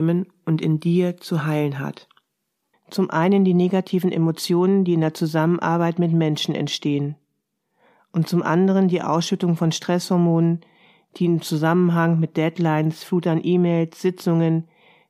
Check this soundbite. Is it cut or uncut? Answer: cut